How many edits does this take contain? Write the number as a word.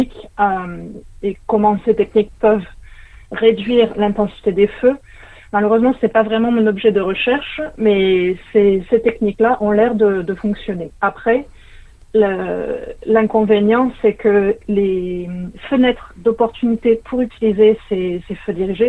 one